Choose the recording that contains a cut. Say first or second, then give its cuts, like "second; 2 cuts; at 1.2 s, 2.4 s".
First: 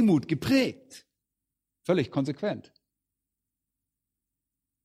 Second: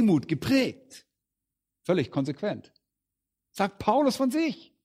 second; 1 cut; at 3.5 s